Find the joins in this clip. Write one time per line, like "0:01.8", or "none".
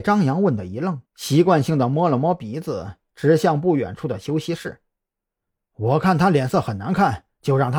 0:01.1